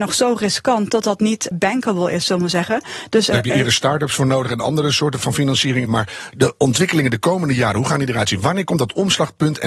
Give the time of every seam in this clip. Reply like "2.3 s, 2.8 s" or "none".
1.5 s, 3.3 s, 5.9 s